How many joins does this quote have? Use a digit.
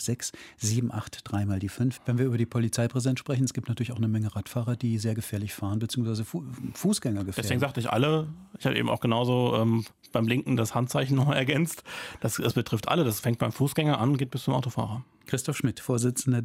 1